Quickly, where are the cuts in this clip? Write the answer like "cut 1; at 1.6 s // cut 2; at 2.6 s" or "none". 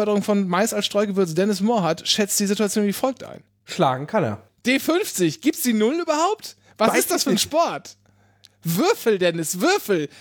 cut 1; at 4.5 s

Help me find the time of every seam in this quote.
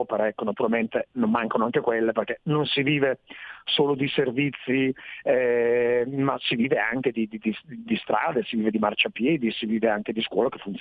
none

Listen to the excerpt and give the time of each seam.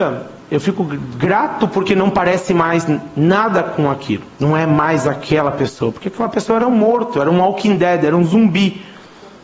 cut 1; at 4.3 s

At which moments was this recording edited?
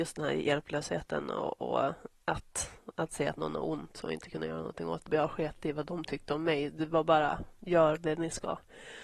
cut 1; at 5.1 s

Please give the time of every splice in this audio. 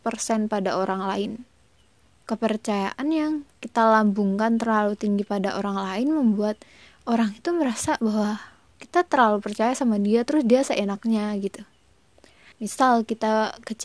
cut 1; at 2.2 s // cut 2; at 12.5 s

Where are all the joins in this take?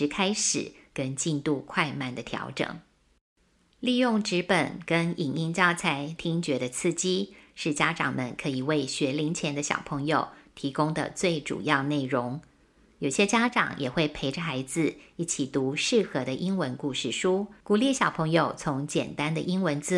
cut 1; at 6.2 s // cut 2; at 17.6 s

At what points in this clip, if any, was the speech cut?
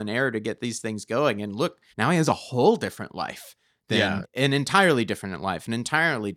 cut 1; at 1.9 s // cut 2; at 4.2 s

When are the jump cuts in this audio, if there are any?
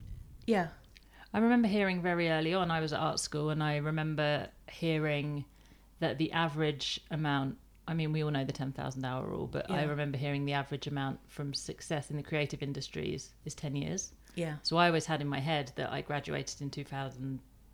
none

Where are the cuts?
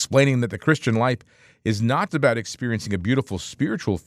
cut 1; at 2.1 s

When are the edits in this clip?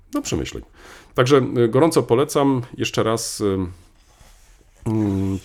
none

